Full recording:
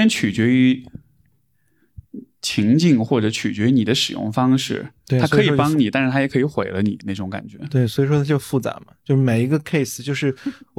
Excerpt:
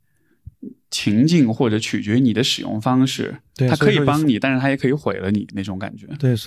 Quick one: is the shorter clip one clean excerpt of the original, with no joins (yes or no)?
yes